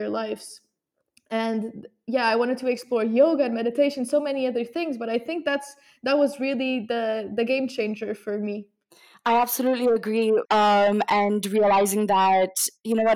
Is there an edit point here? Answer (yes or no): yes